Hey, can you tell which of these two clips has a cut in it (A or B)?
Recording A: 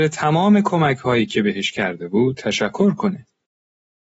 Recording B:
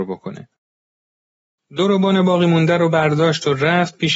B